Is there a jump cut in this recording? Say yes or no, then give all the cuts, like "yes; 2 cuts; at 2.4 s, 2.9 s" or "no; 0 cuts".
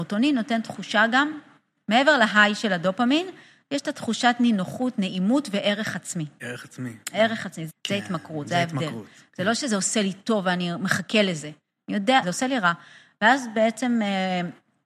yes; 2 cuts; at 7.7 s, 12.2 s